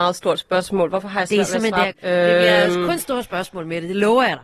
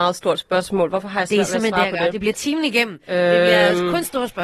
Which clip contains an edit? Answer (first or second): first